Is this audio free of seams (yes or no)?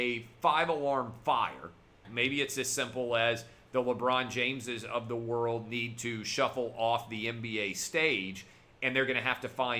no